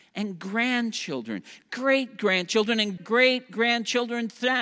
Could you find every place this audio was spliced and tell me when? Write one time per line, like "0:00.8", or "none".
0:03.0